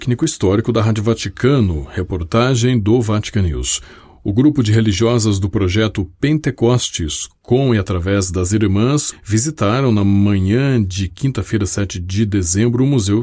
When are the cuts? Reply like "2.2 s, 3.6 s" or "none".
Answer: 9.1 s